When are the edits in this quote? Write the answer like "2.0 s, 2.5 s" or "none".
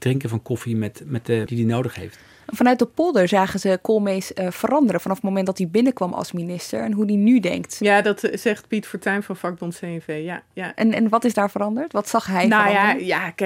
1.5 s